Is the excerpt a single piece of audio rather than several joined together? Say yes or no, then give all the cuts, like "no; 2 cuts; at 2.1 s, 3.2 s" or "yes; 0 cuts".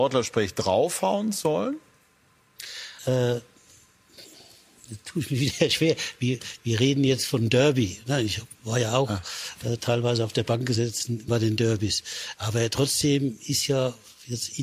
no; 3 cuts; at 3.0 s, 11.3 s, 12.3 s